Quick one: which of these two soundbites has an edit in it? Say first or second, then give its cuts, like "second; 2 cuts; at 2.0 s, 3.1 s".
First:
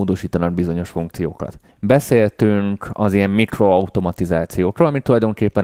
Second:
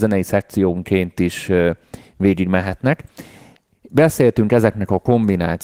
first; 1 cut; at 1.7 s